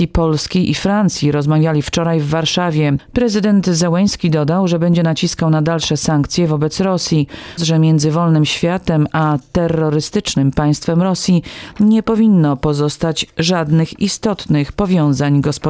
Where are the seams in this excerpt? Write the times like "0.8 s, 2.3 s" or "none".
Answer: 3.1 s, 7.6 s